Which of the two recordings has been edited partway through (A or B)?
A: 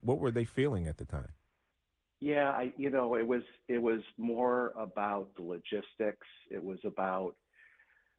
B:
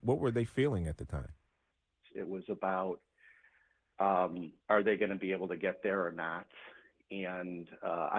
B